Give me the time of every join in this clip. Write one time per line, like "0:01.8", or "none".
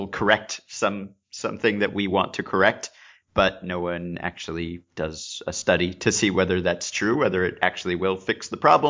none